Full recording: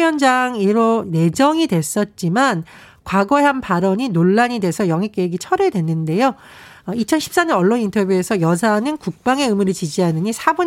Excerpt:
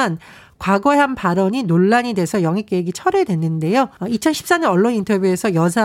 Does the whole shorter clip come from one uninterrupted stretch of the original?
no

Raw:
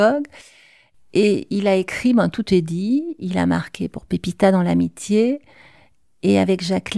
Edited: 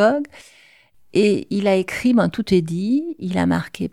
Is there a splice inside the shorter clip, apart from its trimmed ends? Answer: no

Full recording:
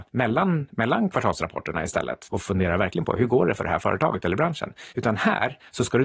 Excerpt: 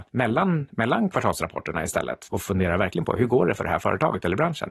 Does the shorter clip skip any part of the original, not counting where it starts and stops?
no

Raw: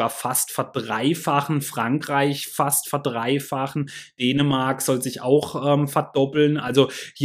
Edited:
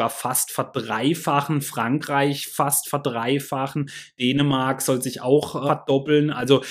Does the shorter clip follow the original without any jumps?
no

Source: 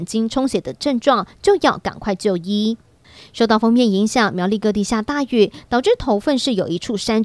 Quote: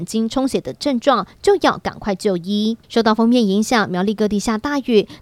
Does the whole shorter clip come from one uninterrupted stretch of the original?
no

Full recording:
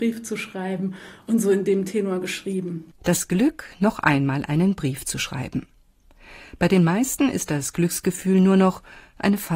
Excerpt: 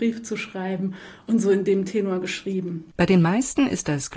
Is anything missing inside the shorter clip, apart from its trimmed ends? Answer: yes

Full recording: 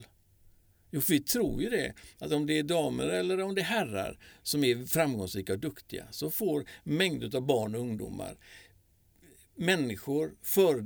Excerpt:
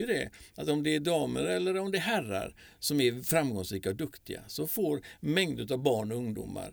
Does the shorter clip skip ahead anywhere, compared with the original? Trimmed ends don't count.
no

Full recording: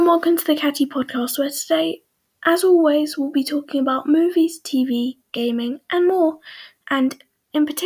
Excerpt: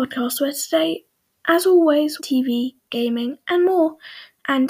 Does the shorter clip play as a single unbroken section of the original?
no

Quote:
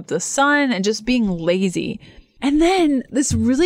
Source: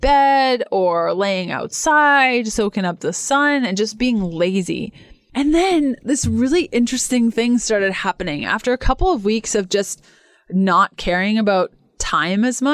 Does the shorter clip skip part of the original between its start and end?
no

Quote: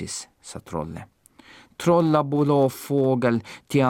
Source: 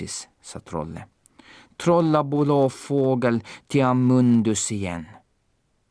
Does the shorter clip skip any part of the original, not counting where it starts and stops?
no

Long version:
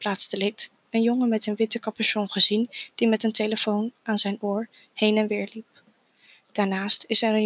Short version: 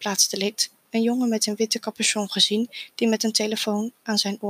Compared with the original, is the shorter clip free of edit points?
yes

